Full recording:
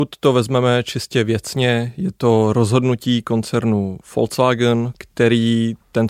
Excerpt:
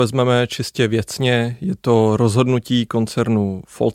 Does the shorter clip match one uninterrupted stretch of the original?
yes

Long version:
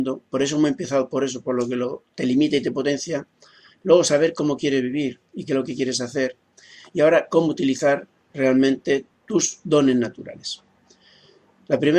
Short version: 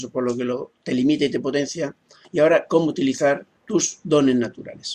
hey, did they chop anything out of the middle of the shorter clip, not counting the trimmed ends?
yes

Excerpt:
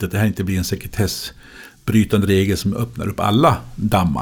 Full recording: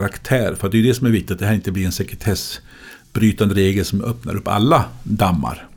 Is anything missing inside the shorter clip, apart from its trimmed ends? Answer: no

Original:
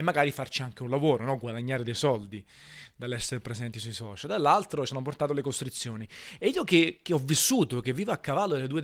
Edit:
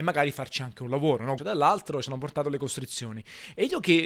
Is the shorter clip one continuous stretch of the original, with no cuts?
no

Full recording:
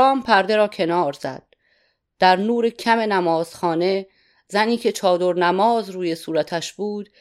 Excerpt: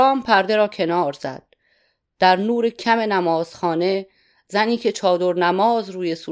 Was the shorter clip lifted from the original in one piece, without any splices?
yes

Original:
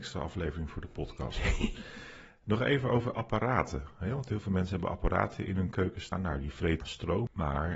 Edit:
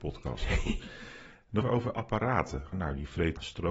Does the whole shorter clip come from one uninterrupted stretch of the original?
no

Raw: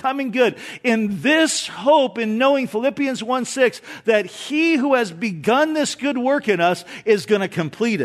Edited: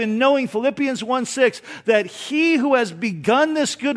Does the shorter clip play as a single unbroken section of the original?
yes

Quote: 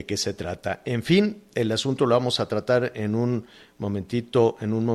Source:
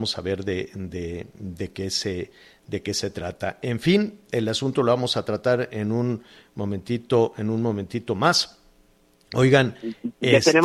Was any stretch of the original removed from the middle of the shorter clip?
no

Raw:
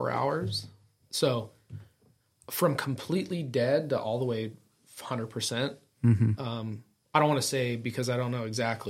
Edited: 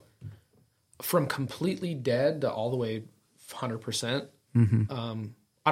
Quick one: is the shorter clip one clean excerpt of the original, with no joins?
yes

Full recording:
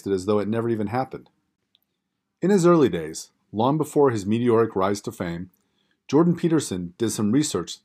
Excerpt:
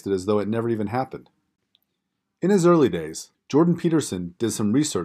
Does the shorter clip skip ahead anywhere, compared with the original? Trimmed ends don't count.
yes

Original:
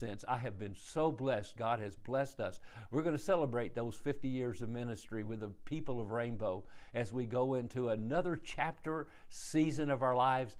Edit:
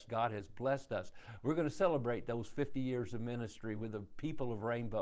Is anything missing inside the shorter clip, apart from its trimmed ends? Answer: no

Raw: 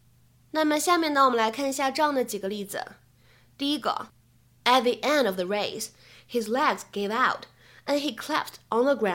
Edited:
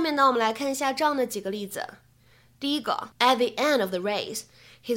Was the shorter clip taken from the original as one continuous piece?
no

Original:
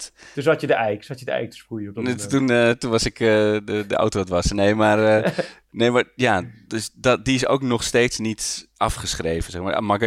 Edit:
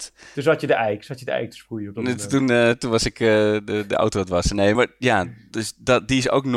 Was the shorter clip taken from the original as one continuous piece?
no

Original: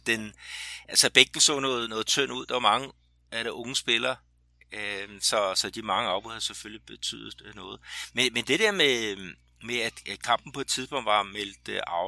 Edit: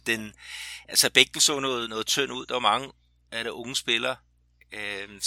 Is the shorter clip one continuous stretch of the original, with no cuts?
yes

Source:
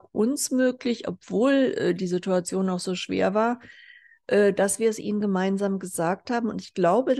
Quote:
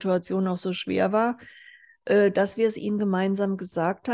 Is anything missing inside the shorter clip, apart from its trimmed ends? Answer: no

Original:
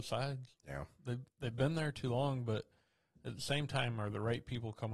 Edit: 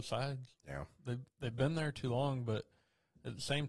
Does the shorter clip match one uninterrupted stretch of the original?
yes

